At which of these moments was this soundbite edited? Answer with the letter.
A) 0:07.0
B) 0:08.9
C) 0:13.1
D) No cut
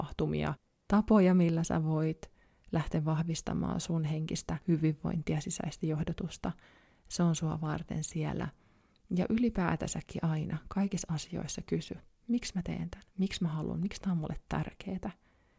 C